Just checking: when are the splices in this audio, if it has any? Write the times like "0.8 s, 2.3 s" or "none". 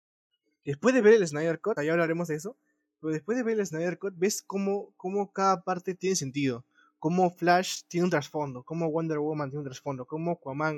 1.8 s